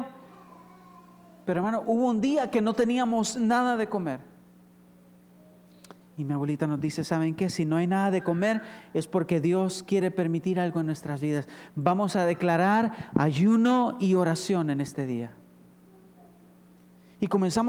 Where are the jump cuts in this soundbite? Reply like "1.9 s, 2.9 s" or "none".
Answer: 6.0 s